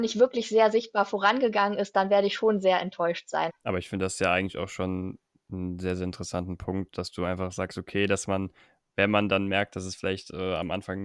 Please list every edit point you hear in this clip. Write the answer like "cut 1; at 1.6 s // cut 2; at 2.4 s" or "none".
cut 1; at 3.5 s

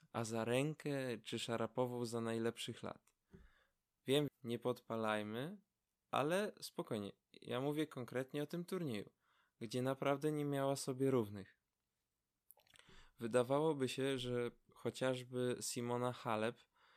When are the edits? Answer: cut 1; at 4.3 s

